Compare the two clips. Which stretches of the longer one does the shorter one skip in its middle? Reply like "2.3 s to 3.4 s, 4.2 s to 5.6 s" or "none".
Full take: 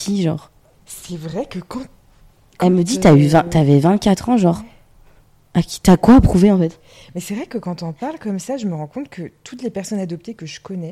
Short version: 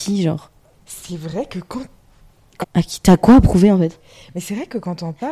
2.6 s to 5.4 s